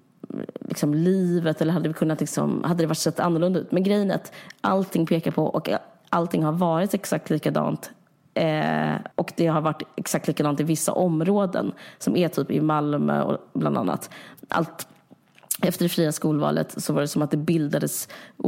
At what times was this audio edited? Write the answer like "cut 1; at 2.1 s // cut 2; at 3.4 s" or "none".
cut 1; at 9.1 s